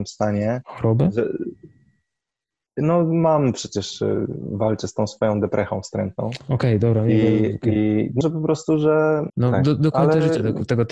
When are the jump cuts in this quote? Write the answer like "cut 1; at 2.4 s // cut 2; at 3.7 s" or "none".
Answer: cut 1; at 8.2 s // cut 2; at 9.3 s